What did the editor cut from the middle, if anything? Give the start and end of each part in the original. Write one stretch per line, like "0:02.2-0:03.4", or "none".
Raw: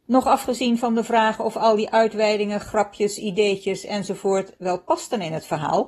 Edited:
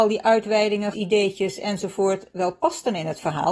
0:02.6-0:03.2